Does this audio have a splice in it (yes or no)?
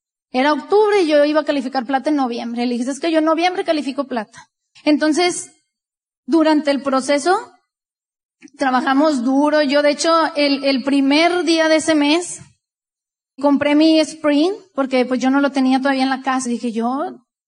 yes